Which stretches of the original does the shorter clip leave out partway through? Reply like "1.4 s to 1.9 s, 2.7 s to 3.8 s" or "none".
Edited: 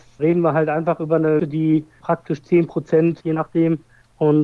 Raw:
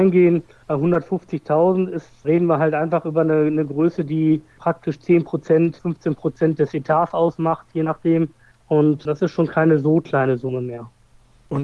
3.4 s to 4.0 s, 5.8 s to 7.7 s